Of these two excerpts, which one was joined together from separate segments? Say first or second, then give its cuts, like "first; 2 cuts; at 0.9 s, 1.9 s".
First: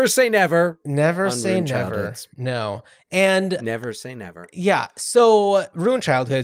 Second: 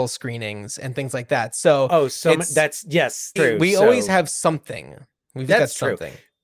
second; 2 cuts; at 3.4 s, 5.5 s